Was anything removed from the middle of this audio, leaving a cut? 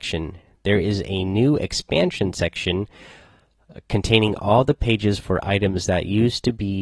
no; 0 cuts

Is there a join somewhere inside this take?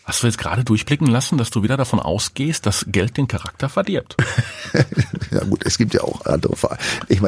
no; 0 cuts

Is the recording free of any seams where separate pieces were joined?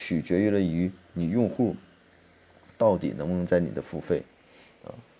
yes; 0 cuts

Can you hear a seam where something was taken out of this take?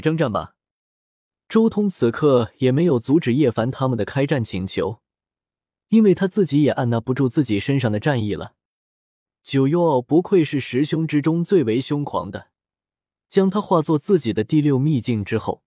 no; 0 cuts

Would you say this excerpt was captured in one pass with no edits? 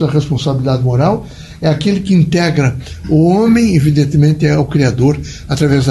yes; 0 cuts

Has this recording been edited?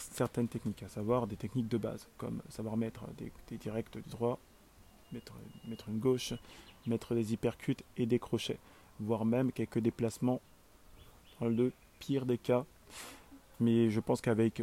no; 0 cuts

